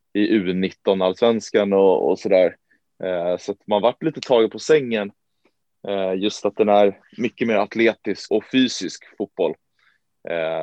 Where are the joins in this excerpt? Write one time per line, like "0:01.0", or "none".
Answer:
0:08.3